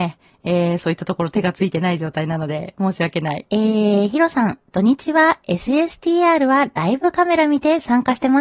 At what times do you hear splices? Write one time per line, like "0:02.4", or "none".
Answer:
0:03.5